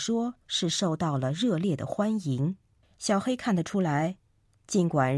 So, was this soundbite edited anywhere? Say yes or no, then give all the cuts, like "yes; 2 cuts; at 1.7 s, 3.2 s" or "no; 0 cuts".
yes; 1 cut; at 2.8 s